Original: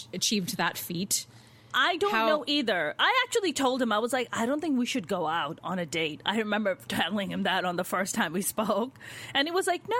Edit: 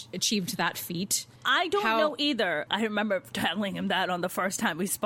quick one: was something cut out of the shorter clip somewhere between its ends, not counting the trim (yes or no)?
yes